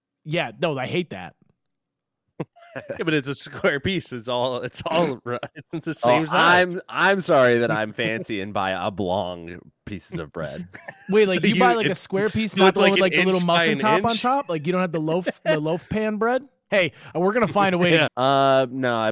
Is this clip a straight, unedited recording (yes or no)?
no